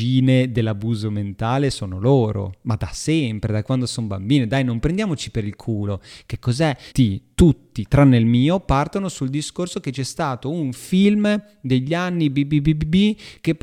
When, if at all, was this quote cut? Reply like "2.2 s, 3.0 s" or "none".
6.9 s